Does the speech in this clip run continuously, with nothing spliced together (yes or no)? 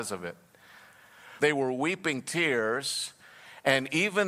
no